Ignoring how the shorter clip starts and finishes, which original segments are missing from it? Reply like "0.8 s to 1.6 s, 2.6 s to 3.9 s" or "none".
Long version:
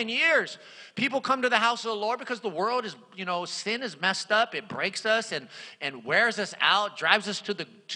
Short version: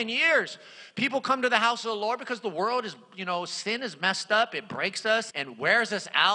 5.3 s to 5.8 s